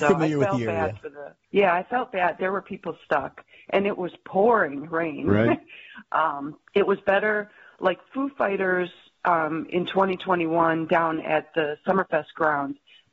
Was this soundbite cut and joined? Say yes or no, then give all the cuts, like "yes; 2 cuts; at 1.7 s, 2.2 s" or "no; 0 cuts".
yes; 2 cuts; at 1.4 s, 6.7 s